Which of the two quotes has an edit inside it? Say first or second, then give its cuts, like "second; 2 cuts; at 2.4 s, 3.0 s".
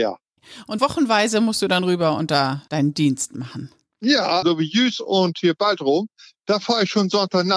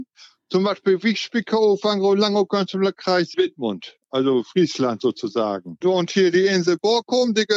first; 1 cut; at 4.4 s